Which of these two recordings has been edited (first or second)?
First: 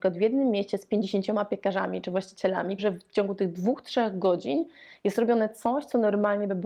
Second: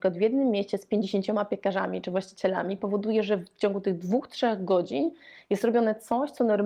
first